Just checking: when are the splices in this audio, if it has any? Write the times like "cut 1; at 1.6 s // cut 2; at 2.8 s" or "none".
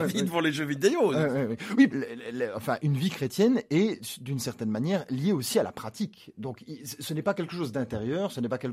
cut 1; at 1.9 s